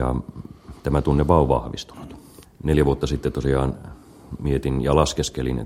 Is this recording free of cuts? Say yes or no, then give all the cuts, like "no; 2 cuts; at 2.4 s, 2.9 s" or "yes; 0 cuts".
no; 1 cut; at 2.4 s